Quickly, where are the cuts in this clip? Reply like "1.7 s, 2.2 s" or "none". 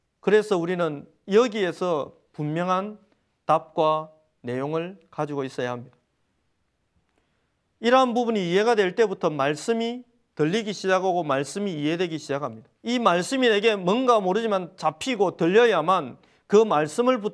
12.8 s